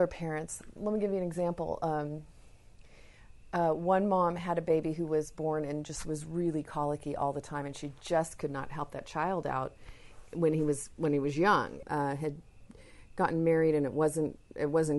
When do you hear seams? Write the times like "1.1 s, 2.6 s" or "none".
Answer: 11.8 s